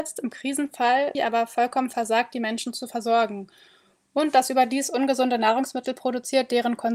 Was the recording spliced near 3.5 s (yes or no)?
no